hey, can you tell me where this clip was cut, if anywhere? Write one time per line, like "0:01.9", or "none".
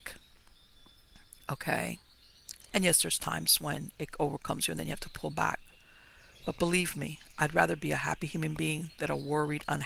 none